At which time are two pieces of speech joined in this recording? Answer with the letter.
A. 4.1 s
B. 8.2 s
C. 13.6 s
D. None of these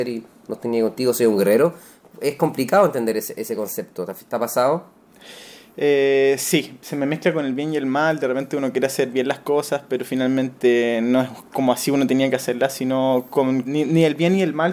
C